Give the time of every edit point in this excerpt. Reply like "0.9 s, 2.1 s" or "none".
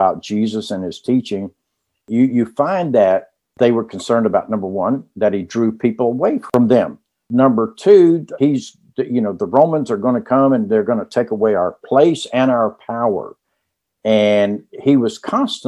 8.4 s